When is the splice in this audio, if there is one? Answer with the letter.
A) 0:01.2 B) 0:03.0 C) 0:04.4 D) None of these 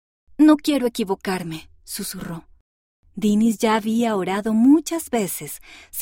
B